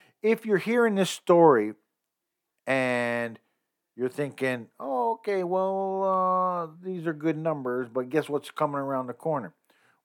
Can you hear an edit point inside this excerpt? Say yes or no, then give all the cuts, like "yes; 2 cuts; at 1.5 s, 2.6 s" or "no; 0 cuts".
no; 0 cuts